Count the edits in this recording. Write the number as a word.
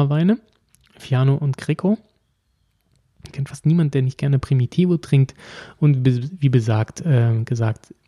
one